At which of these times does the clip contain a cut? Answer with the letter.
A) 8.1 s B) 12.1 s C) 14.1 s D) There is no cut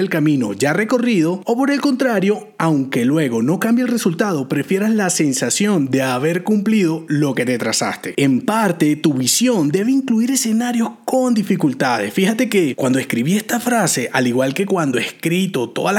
A